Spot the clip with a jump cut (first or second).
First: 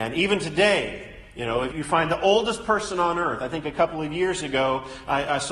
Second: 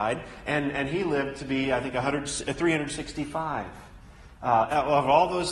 first